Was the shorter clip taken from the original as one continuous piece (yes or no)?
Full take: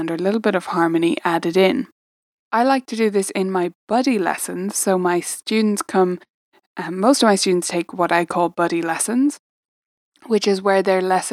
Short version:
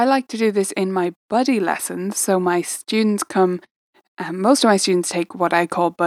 yes